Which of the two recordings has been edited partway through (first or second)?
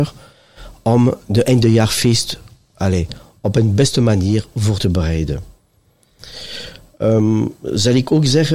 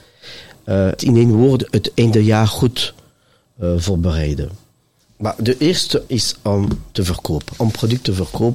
second